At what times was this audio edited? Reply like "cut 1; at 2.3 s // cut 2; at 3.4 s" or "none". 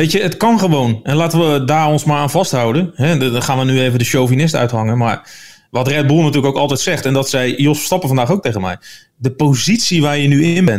none